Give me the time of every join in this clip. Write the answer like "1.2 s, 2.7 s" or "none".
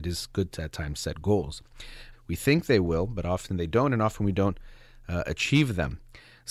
2.1 s